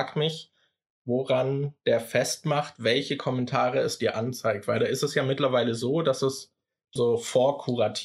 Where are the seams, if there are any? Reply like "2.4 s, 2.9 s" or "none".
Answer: 7.0 s